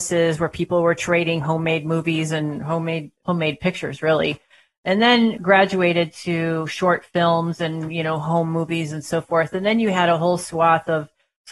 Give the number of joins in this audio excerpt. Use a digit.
1